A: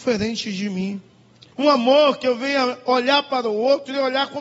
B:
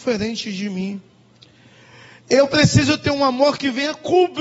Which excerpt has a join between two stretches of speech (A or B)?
A